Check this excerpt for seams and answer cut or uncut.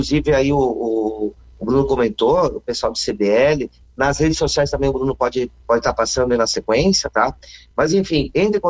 uncut